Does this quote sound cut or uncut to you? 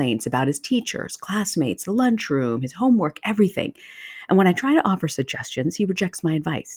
uncut